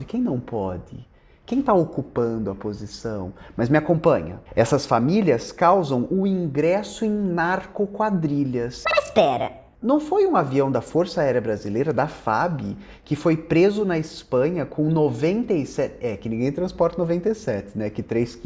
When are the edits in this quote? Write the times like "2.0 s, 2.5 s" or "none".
4.5 s